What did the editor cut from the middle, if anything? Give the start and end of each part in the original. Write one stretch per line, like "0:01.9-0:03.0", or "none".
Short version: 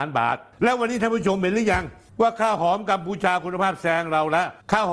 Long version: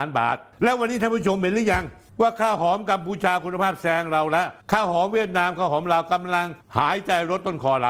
none